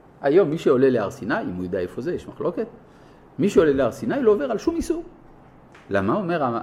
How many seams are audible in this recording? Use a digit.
0